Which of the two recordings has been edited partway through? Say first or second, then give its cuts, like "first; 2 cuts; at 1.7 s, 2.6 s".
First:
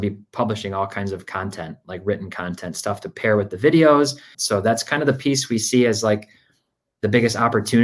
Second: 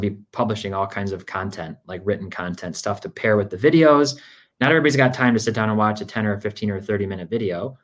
first; 1 cut; at 4.3 s